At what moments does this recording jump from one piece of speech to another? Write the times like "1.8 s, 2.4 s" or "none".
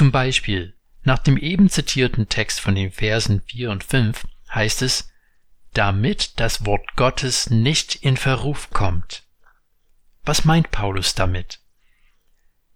none